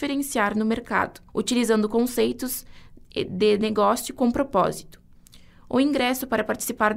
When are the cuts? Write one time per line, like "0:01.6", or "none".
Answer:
0:01.3